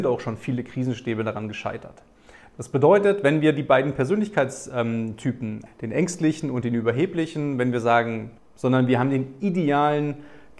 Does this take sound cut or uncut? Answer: cut